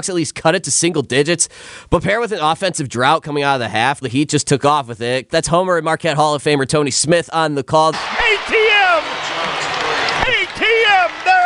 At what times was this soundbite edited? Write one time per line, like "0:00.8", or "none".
0:04.0
0:05.3
0:07.9